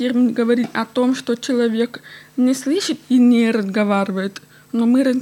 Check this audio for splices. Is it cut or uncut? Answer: uncut